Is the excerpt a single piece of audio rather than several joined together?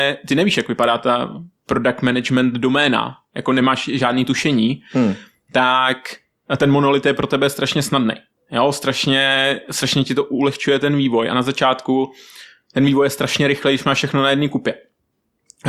yes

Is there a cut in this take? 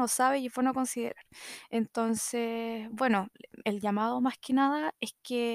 no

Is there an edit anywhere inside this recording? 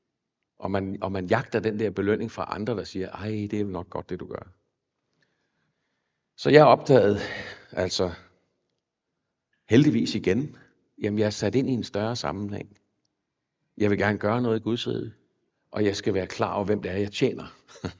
yes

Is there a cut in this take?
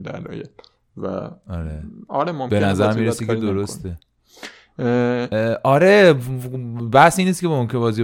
no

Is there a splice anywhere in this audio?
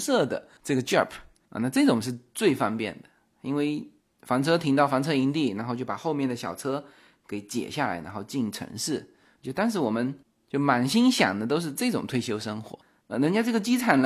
yes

